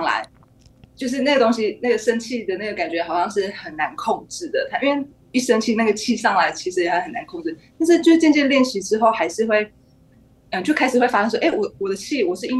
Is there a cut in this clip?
no; 0 cuts

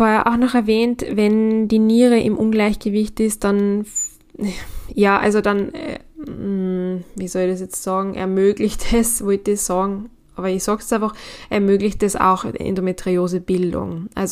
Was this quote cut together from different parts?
no; 0 cuts

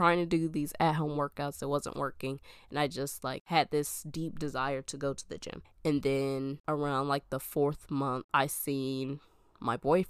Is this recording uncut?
no; 1 cut; at 5.6 s

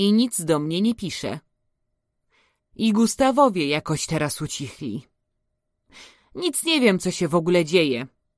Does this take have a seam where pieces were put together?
yes; 1 cut; at 2.6 s

